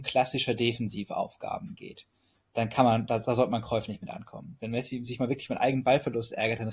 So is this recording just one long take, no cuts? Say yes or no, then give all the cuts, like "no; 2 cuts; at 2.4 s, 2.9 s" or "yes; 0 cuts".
no; 1 cut; at 4.6 s